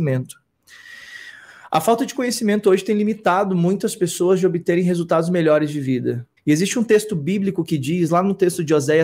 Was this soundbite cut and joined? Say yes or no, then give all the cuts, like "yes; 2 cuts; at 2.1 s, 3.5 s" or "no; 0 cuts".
yes; 1 cut; at 6.4 s